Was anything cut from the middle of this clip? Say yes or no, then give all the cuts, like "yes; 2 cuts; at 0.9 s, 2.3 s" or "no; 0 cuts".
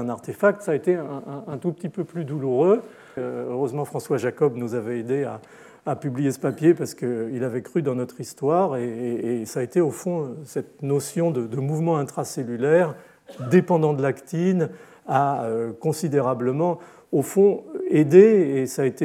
yes; 1 cut; at 3.2 s